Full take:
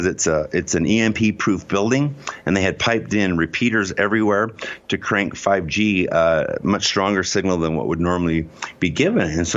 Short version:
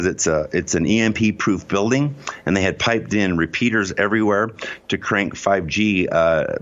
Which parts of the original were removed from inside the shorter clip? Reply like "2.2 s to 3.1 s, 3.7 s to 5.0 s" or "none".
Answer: none